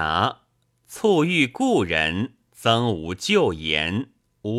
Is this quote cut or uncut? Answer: uncut